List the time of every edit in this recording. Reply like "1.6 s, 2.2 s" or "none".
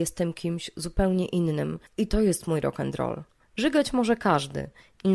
1.9 s, 3.4 s